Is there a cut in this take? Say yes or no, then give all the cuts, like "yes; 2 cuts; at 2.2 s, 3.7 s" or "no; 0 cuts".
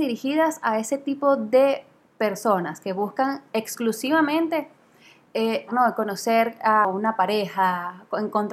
yes; 1 cut; at 5.7 s